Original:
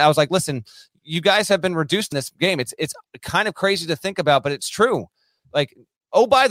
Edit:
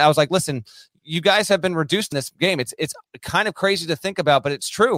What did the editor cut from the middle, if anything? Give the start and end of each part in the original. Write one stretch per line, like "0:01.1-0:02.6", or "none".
none